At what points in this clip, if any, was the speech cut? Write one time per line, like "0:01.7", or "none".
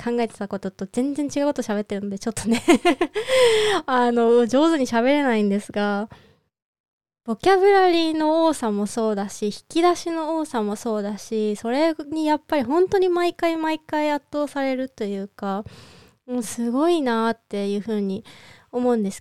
0:07.2